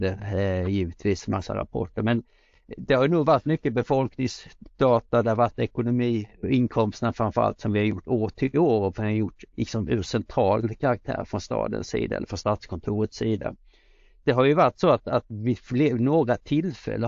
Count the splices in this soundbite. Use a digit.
1